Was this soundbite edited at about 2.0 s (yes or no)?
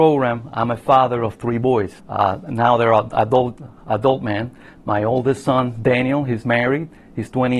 yes